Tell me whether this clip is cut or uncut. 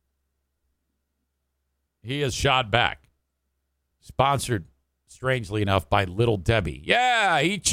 cut